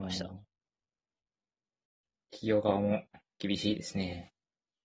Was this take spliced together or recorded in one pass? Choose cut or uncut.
uncut